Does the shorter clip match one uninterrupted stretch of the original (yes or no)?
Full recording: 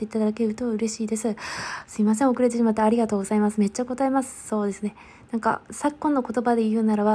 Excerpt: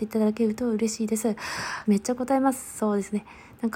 no